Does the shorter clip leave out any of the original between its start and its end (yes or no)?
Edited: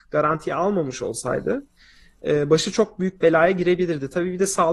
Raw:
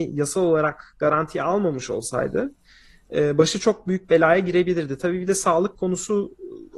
no